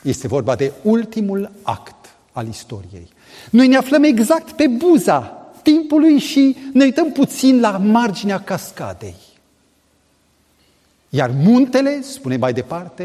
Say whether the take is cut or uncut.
uncut